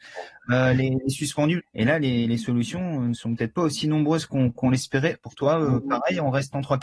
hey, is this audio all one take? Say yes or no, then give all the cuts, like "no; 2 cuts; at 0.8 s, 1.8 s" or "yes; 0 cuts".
no; 2 cuts; at 1.6 s, 5.2 s